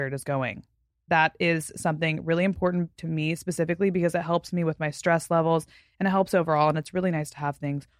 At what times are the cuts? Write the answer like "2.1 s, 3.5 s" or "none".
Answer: 1.1 s